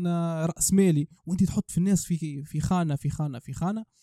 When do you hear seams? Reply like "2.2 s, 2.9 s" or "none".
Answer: 1.2 s